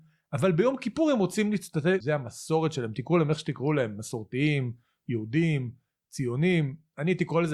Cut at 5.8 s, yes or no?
no